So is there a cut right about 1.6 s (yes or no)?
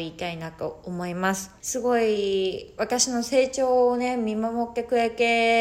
yes